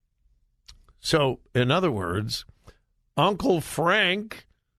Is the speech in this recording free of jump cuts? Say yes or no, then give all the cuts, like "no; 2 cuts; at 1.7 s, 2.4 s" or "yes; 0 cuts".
yes; 0 cuts